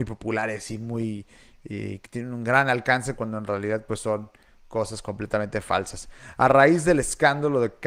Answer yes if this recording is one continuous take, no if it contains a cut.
yes